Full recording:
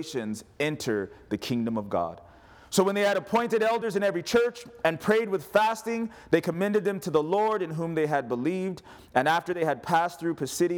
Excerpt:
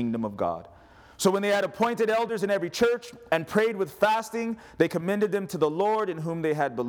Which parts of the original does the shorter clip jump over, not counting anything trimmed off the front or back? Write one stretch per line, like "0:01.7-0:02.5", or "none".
none

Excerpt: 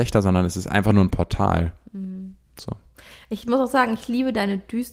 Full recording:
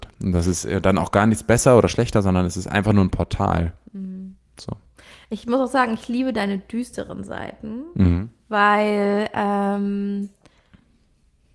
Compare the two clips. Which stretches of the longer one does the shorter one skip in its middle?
none

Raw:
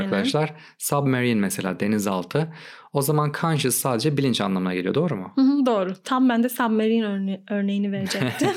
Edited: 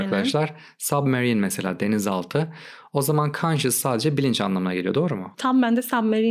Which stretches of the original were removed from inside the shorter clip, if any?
0:05.3-0:06.0

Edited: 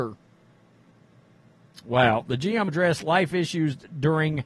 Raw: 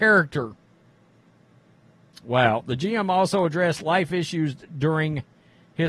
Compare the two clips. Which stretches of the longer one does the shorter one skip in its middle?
0:03.1-0:03.5

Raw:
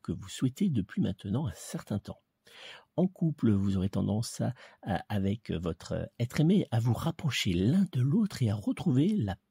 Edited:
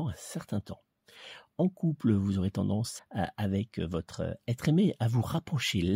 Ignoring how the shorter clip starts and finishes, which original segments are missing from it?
0:04.4-0:04.7

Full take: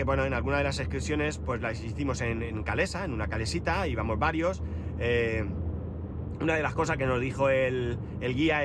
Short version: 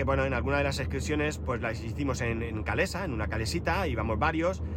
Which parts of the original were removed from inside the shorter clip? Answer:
none

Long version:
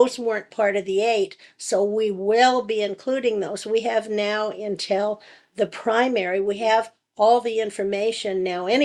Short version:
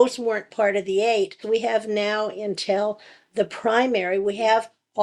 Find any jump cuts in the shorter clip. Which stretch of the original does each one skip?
0:01.4-0:03.6

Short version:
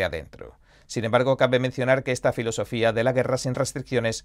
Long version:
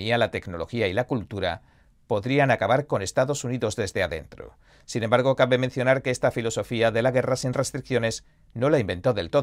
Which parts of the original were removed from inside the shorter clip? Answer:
none

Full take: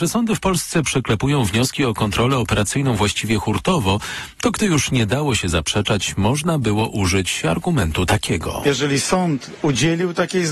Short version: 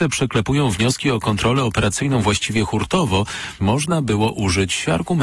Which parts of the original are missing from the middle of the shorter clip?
0:04.3-0:06.2

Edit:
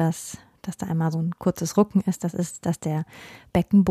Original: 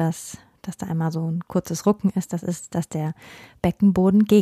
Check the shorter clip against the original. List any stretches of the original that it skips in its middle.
0:01.1-0:01.2

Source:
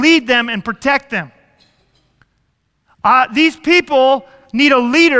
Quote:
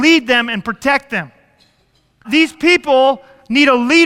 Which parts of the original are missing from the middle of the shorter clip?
0:02.2-0:03.3

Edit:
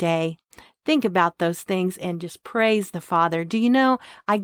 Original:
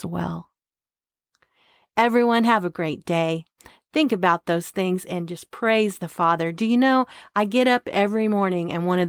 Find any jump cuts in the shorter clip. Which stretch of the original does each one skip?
none

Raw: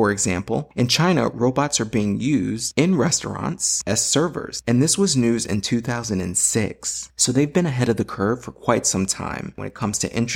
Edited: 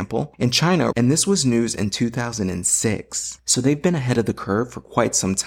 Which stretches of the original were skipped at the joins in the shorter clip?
0:01.3-0:04.6

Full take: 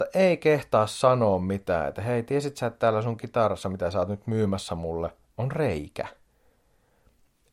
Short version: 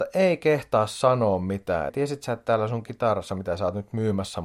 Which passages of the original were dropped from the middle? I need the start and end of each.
0:01.9-0:02.2

